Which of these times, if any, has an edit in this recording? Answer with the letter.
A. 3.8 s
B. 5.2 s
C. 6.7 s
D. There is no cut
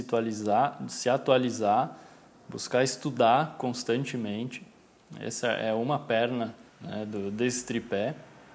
C